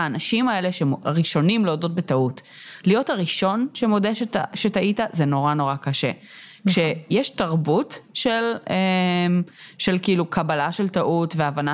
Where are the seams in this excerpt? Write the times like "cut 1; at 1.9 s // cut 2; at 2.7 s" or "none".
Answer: none

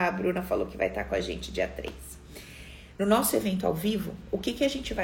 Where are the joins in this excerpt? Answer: none

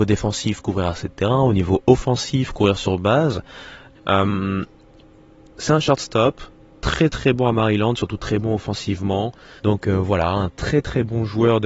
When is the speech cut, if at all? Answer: cut 1; at 3.9 s // cut 2; at 9.6 s

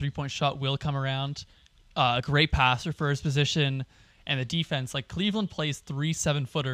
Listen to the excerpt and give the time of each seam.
none

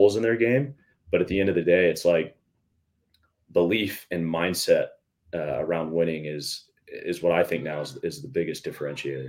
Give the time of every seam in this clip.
none

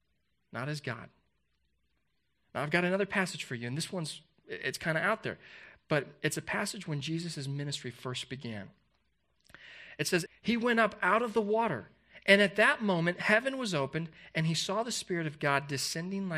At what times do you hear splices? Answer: cut 1; at 10.3 s

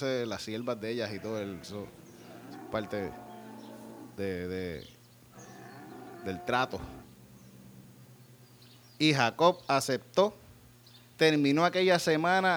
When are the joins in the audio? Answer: none

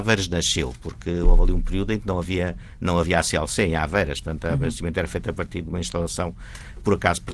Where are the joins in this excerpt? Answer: none

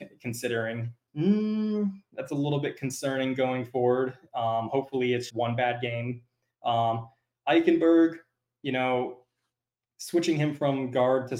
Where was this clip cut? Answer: cut 1; at 1.1 s // cut 2; at 5.3 s

